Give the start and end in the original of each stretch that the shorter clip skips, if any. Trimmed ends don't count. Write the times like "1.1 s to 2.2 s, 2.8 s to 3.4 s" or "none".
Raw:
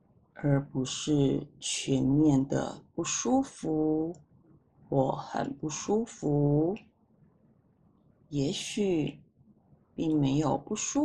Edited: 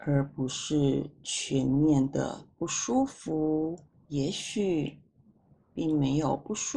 4.4 s to 8.3 s